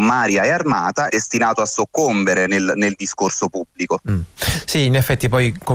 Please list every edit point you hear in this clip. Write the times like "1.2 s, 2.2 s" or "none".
1.1 s